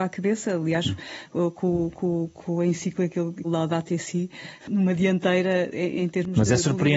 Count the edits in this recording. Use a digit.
2